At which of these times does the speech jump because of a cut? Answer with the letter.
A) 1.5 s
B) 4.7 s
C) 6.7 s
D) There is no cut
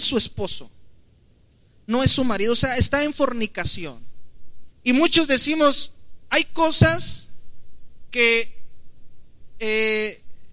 B